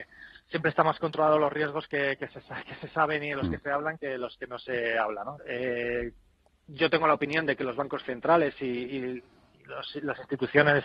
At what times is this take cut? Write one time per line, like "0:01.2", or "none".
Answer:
0:05.4

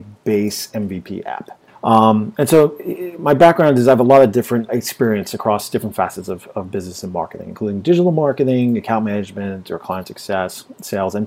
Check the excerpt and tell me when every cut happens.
0:01.7
0:04.7

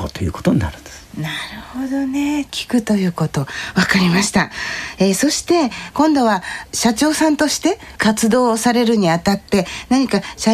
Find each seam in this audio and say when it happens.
none

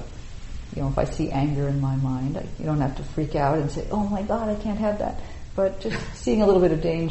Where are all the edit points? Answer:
none

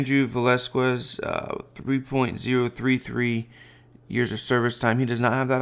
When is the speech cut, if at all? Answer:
none

